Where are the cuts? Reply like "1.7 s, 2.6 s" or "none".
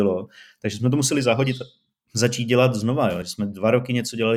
none